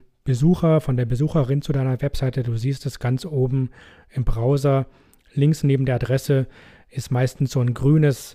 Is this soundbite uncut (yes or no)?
yes